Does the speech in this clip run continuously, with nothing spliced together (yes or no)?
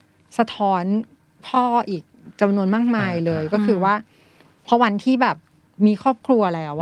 yes